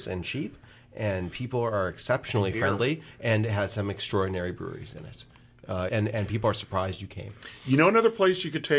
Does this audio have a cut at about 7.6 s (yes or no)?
no